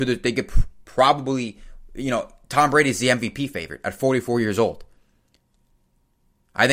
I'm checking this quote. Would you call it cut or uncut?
uncut